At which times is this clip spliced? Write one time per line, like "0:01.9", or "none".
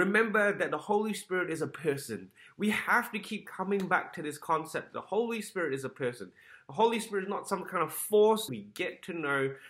0:08.5